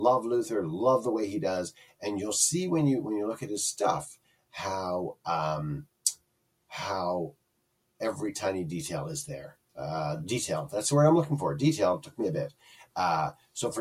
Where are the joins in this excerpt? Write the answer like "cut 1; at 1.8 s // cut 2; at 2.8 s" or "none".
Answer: none

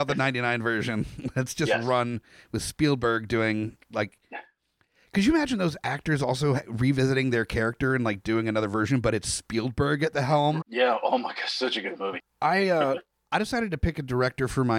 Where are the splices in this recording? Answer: cut 1; at 10.6 s // cut 2; at 12.2 s

